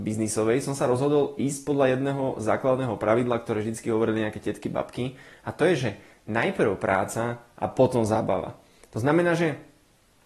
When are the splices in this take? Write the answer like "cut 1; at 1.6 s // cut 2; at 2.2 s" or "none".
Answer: none